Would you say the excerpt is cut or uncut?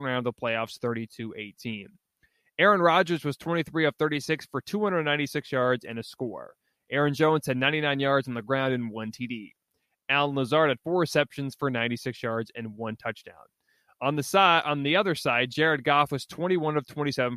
uncut